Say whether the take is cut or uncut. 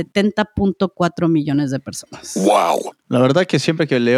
uncut